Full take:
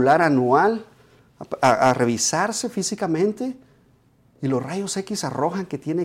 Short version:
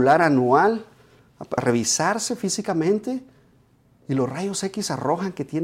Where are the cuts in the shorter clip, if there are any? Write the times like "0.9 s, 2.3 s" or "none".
1.6 s